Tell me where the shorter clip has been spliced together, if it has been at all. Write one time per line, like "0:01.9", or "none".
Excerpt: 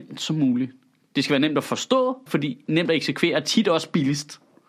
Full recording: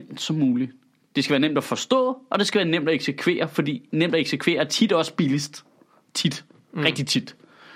0:02.3